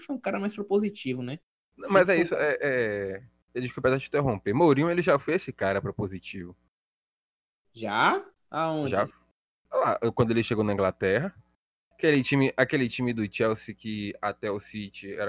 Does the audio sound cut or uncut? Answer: uncut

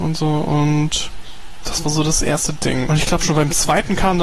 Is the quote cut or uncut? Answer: cut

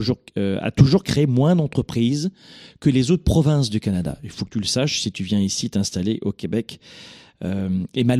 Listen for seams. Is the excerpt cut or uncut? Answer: cut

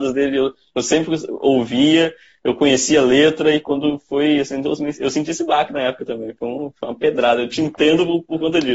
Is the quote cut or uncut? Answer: uncut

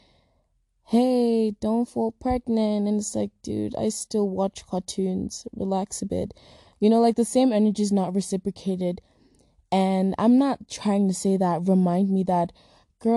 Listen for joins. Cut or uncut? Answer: uncut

